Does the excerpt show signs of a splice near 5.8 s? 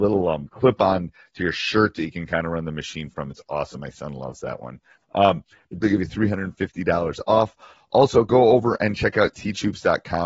yes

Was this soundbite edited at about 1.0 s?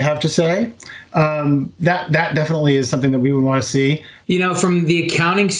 no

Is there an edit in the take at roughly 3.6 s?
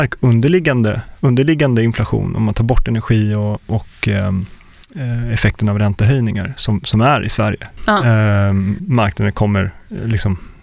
no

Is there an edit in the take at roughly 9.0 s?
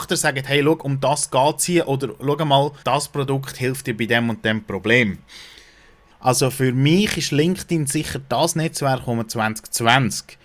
no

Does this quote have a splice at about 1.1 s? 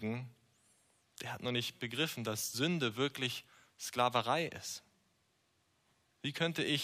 no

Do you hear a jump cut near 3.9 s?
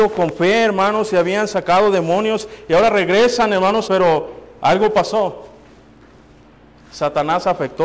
yes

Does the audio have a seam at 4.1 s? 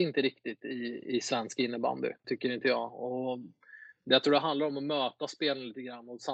no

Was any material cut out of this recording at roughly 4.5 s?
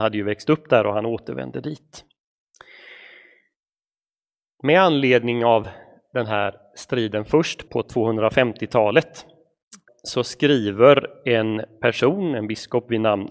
no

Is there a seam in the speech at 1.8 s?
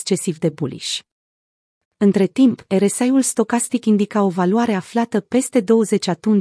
yes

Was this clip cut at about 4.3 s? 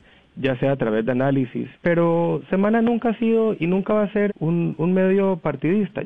yes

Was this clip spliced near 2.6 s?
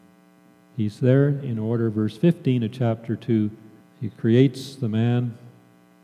no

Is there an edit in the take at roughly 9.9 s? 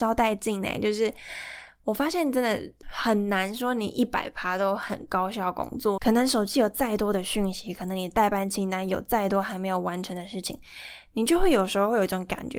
no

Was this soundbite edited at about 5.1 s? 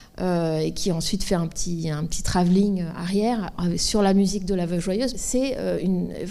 yes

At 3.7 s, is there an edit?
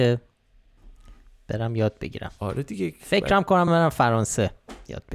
yes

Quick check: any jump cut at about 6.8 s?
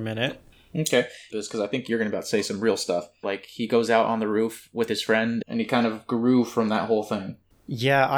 no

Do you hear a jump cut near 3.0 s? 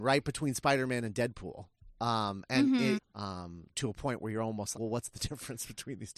yes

